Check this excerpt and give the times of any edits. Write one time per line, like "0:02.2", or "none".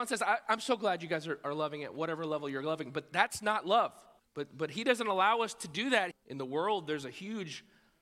0:04.2
0:06.1